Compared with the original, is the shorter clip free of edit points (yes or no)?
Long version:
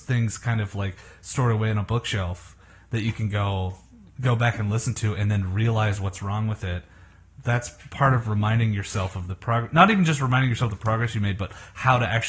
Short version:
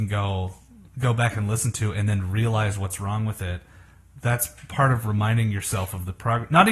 yes